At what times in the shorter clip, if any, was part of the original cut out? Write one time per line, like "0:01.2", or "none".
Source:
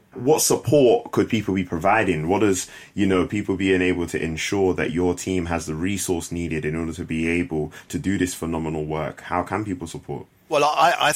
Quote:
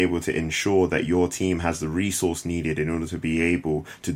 none